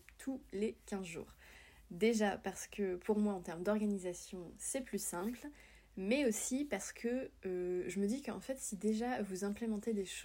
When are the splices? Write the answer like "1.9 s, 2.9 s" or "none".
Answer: none

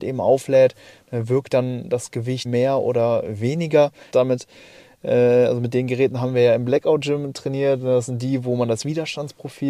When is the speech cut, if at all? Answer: 2.4 s, 4.1 s

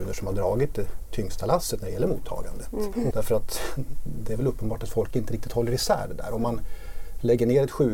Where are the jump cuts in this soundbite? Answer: 3.1 s

